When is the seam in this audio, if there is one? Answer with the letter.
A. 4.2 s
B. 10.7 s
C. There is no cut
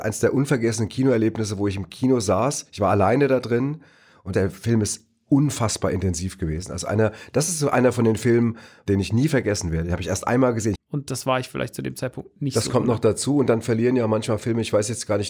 B